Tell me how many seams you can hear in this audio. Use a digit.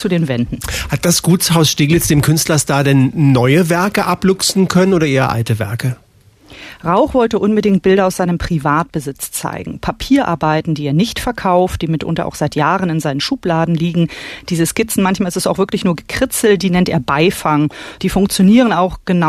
1